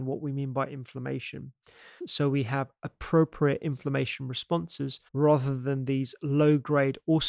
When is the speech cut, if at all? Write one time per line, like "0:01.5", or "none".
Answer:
0:02.0
0:05.1